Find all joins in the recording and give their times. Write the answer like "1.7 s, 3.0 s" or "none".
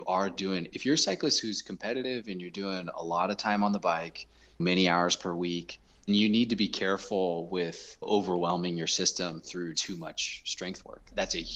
6.1 s, 9.7 s